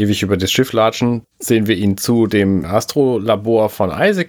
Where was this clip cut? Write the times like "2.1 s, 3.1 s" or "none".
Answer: 1.2 s, 2.6 s